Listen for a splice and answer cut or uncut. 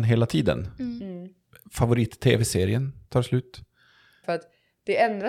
cut